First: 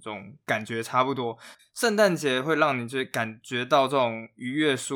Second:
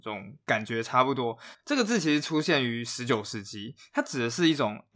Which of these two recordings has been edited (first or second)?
first